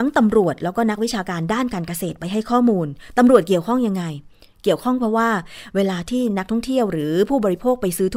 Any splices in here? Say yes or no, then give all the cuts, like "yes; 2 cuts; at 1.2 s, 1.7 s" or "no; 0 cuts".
no; 0 cuts